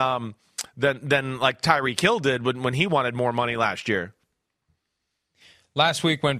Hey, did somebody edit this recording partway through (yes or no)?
no